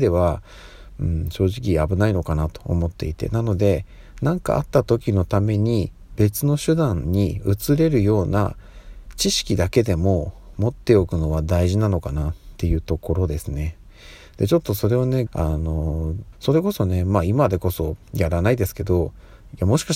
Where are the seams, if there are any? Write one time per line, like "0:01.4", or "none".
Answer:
0:15.3
0:16.3